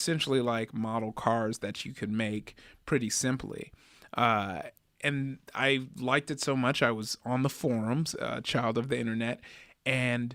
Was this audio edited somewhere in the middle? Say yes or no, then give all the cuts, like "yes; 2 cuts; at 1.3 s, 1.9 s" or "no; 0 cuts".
yes; 1 cut; at 8.1 s